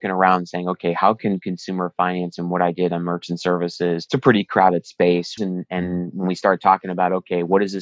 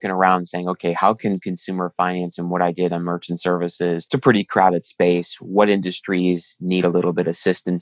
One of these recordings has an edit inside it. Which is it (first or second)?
first